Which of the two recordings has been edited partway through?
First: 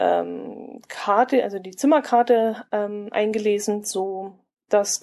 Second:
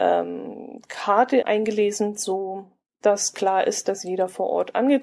second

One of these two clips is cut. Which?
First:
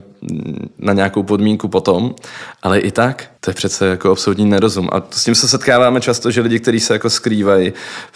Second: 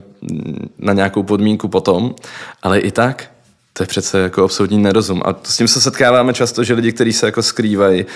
first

